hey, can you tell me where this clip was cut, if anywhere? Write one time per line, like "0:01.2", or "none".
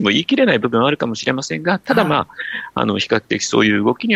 none